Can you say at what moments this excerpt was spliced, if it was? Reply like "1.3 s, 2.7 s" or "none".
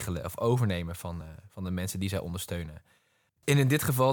none